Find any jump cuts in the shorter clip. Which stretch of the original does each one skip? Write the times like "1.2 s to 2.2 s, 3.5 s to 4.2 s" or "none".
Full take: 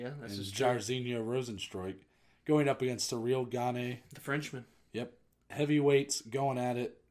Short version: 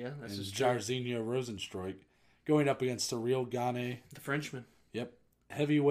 none